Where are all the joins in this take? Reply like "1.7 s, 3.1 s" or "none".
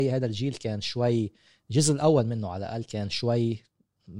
none